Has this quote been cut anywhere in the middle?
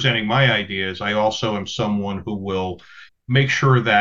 yes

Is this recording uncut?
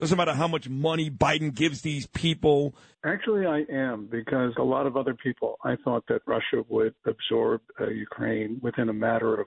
no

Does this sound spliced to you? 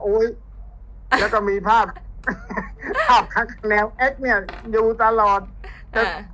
no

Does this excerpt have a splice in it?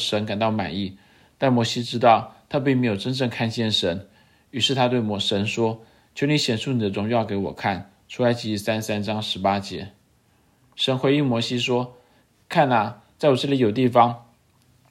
no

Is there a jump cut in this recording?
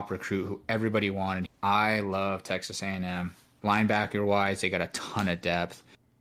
yes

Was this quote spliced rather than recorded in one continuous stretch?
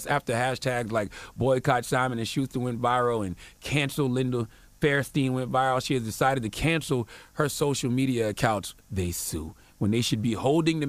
yes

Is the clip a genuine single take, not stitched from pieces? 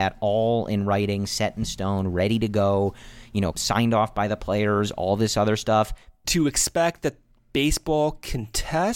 no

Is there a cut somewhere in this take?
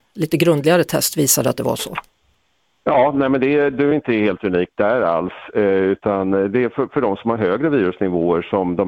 no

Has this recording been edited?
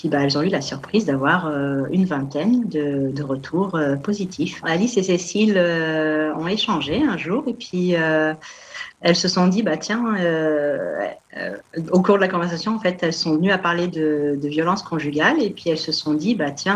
yes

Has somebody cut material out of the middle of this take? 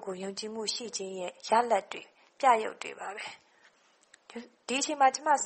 no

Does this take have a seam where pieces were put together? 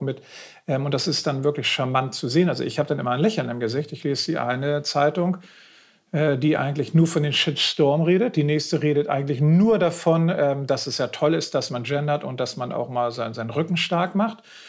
no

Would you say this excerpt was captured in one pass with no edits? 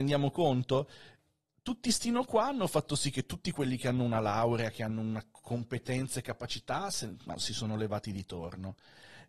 yes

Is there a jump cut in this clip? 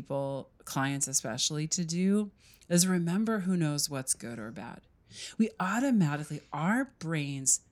no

